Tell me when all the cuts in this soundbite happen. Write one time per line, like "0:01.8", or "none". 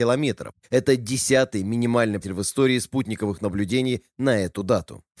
0:02.2